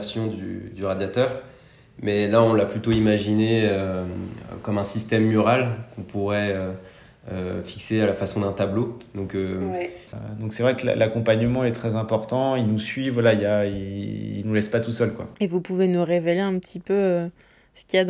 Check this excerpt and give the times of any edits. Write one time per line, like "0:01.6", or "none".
0:10.1

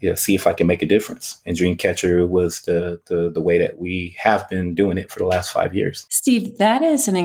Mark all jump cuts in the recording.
none

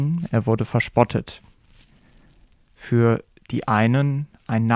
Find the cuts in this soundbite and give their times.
0:02.5

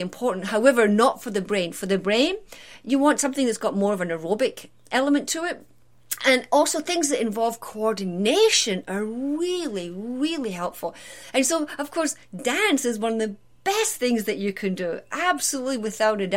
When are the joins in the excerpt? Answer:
none

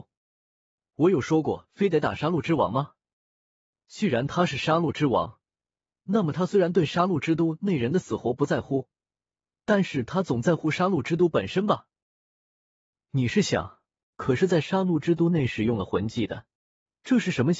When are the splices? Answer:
0:14.1

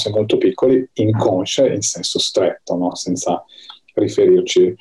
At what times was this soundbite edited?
none

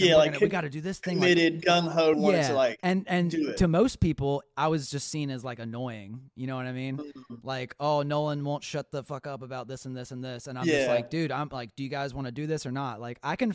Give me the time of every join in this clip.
0:02.1

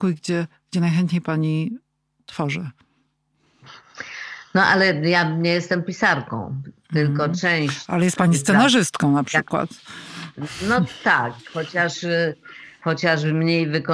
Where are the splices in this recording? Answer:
none

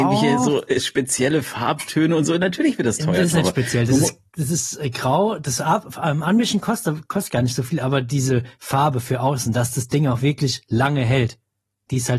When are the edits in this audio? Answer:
none

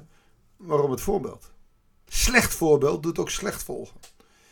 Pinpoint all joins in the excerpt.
0:02.1

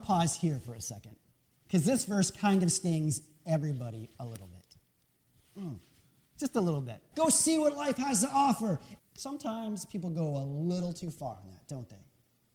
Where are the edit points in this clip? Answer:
0:07.1
0:09.0

